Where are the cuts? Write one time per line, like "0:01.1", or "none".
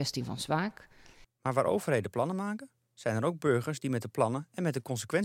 0:01.2